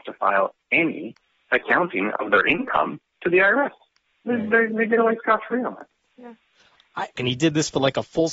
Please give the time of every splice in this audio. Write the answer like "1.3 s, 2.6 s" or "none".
7.2 s